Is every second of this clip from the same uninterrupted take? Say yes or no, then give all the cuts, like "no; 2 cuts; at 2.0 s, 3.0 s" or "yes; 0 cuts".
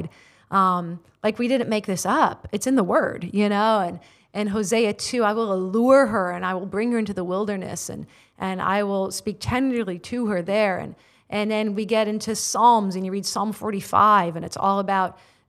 yes; 0 cuts